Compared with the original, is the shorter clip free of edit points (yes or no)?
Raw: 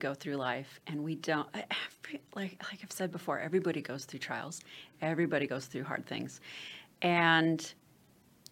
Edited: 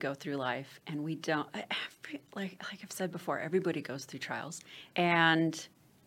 no